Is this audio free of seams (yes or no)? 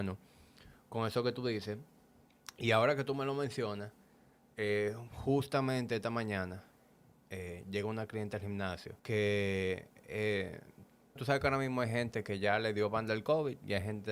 no